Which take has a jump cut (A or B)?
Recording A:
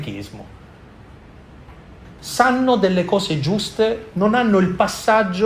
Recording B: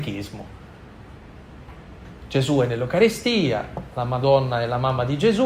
A